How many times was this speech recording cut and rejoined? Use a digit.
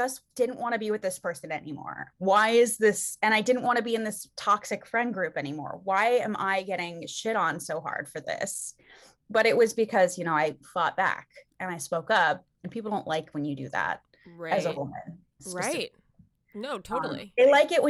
0